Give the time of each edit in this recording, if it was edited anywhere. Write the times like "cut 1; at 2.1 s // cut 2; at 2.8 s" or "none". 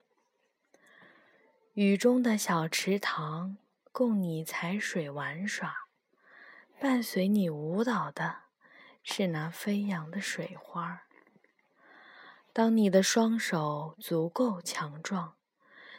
none